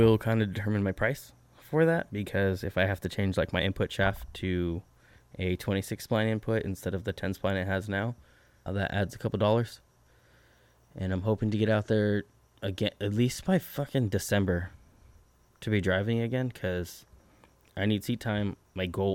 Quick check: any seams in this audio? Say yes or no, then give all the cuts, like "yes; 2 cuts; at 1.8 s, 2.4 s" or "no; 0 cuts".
yes; 1 cut; at 8.7 s